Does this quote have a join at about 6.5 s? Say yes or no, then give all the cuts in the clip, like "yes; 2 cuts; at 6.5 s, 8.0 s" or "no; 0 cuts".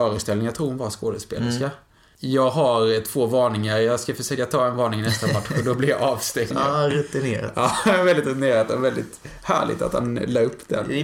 yes; 1 cut; at 6.5 s